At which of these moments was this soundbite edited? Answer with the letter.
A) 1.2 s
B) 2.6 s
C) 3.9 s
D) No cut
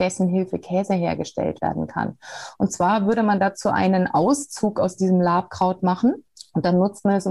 D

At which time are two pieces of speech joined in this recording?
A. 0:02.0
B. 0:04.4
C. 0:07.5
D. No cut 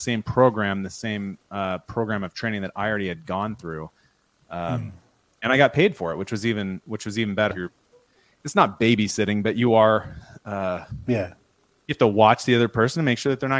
C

